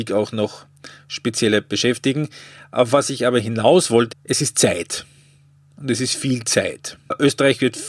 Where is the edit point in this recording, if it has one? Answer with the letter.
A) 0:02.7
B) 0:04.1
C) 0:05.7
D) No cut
B